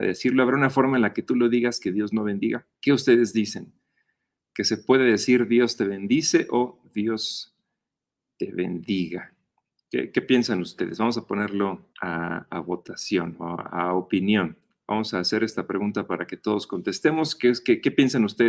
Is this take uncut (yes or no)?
no